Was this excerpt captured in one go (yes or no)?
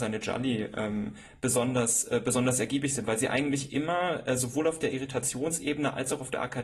yes